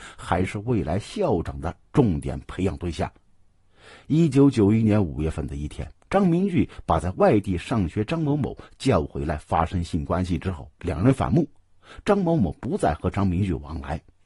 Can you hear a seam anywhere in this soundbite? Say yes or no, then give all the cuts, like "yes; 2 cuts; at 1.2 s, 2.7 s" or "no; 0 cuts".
no; 0 cuts